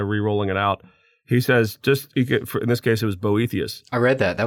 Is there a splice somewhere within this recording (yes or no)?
no